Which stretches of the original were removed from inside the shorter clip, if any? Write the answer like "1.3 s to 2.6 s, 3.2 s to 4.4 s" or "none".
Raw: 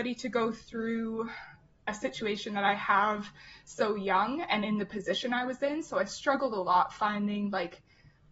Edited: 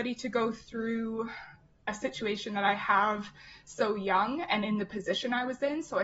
none